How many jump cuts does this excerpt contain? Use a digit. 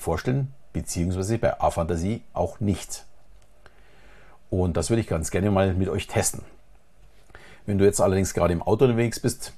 1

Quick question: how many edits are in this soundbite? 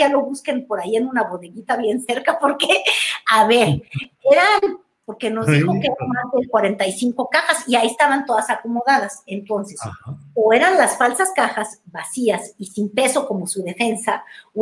1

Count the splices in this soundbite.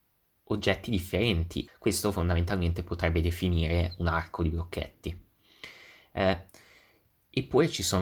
1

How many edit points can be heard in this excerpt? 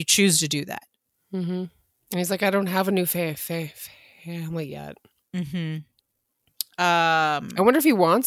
0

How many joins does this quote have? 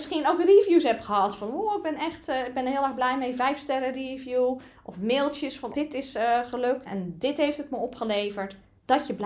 2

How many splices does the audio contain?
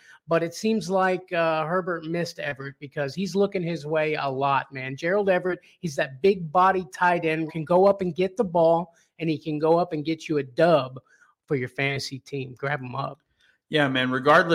1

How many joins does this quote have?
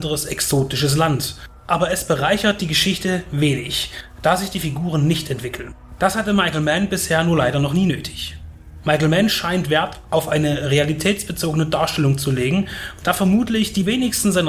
3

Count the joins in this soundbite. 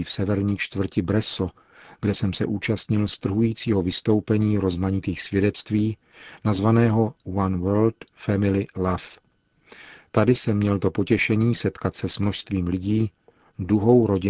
0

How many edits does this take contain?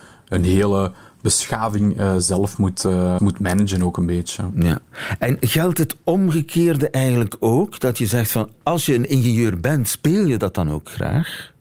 1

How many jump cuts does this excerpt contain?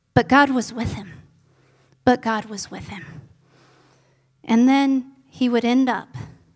0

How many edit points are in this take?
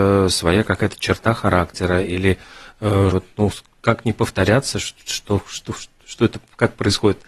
1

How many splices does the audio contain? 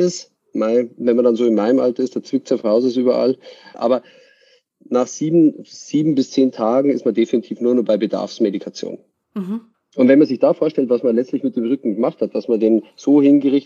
1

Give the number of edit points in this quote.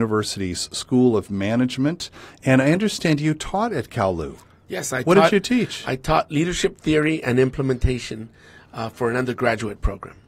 0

